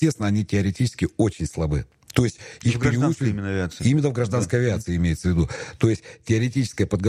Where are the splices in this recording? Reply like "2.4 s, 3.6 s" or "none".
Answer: none